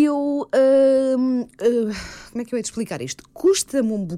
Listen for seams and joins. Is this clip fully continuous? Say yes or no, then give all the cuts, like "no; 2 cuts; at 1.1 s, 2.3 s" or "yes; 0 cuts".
yes; 0 cuts